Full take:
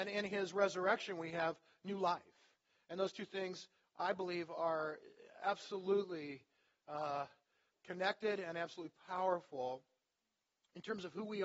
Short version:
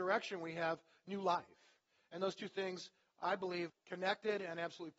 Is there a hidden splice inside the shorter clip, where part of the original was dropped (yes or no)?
yes